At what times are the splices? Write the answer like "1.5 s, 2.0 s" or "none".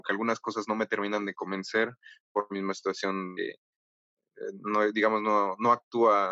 none